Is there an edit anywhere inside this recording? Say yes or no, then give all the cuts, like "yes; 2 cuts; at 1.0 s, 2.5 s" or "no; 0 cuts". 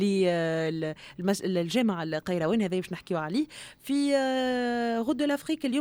no; 0 cuts